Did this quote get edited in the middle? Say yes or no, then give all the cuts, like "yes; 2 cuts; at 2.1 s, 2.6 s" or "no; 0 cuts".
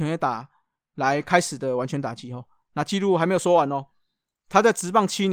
no; 0 cuts